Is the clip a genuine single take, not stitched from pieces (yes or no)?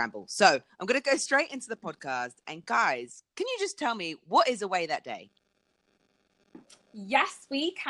yes